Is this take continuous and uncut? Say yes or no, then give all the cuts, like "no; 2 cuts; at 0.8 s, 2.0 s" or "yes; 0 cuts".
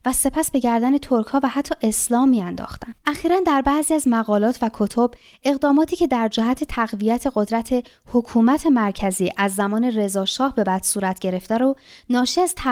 no; 1 cut; at 3.0 s